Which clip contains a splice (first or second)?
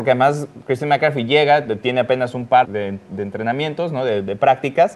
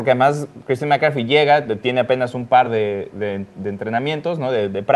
first